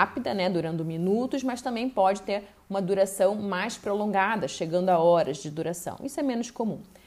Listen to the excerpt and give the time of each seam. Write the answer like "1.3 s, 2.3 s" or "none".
none